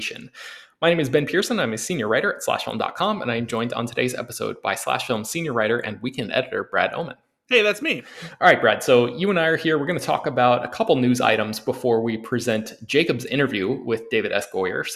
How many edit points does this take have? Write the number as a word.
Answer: zero